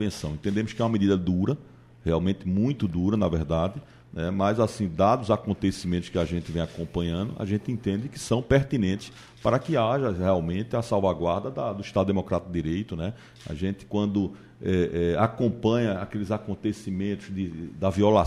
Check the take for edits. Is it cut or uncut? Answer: uncut